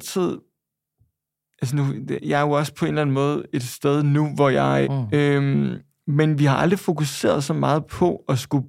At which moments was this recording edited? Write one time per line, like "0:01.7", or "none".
0:04.8